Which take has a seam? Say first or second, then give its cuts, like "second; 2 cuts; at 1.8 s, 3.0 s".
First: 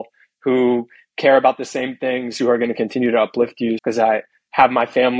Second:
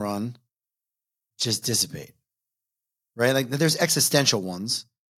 first; 2 cuts; at 2.4 s, 3.8 s